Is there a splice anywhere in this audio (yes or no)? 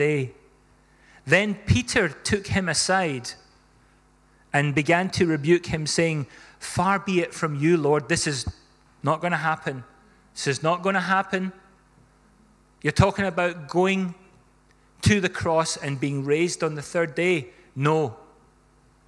no